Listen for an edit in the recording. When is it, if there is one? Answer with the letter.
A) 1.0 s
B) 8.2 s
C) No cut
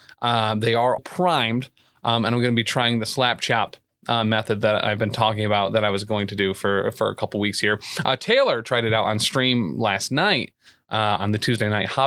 A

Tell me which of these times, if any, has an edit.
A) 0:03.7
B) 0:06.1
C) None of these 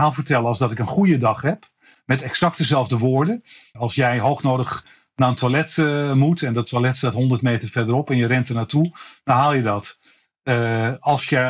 A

